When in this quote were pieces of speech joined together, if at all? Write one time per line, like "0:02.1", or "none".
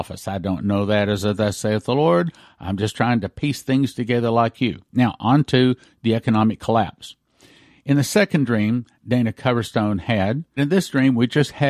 0:04.9
0:10.6